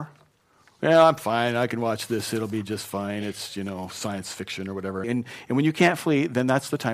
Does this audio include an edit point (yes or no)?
yes